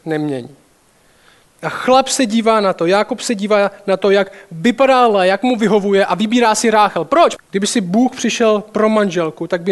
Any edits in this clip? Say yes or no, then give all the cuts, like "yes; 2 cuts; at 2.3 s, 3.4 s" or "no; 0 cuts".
yes; 1 cut; at 7.4 s